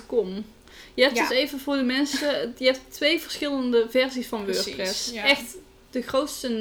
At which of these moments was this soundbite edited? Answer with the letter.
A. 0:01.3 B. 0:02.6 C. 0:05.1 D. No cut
D